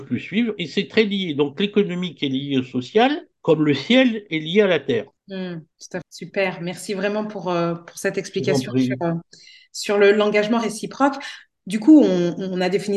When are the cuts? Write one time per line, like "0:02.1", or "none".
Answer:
0:06.0